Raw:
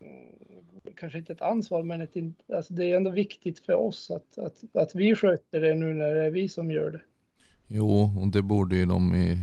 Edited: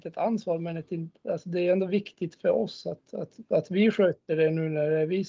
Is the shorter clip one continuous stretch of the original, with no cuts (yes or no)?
yes